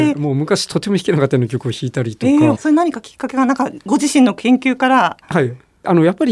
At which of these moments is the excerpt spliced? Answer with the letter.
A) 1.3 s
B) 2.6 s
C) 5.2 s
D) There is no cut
B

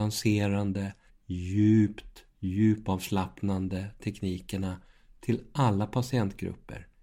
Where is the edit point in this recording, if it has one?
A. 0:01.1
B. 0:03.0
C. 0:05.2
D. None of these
A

